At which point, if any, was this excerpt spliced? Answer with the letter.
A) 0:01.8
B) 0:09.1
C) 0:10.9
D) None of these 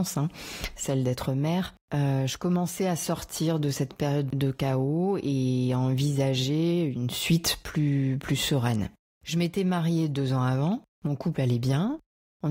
C